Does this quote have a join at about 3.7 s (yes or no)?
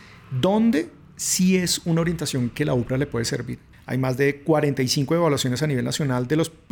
yes